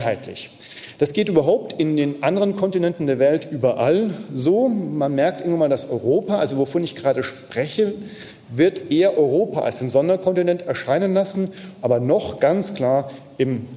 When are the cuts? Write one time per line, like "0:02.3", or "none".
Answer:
0:11.8